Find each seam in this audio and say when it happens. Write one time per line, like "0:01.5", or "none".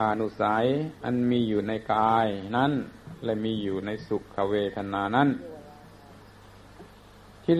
0:01.0